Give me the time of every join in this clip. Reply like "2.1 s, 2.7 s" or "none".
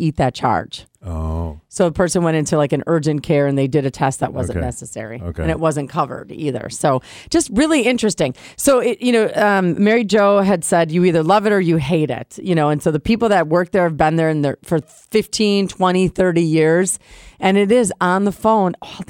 none